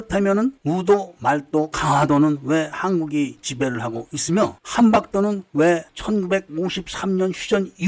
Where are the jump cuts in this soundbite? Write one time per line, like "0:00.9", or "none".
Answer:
none